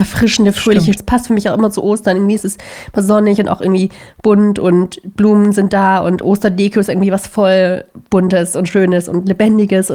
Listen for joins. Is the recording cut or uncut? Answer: cut